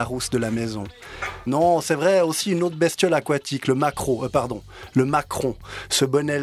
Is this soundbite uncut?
no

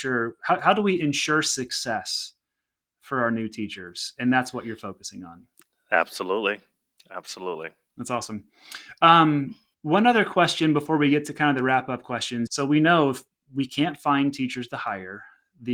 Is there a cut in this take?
yes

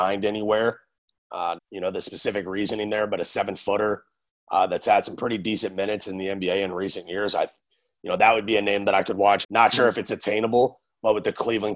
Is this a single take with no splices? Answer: no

